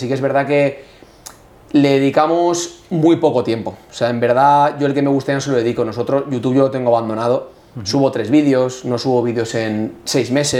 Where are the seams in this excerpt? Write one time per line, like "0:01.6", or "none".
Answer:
none